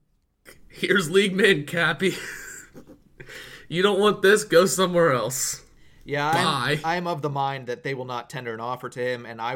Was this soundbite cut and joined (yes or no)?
no